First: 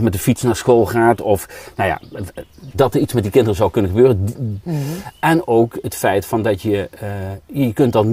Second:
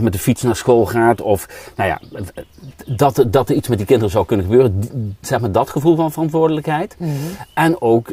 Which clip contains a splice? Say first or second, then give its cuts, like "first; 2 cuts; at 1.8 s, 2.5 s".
first; 2 cuts; at 2.7 s, 4.6 s